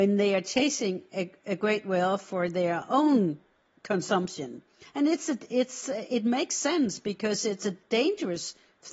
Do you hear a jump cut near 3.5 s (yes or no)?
no